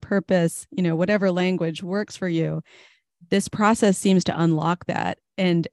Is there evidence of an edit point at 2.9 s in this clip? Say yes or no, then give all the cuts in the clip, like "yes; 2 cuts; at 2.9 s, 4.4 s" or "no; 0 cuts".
no; 0 cuts